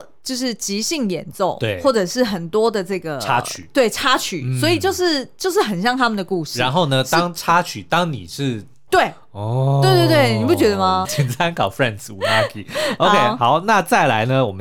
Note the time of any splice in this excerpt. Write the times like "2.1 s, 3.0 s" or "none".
8.9 s, 11.0 s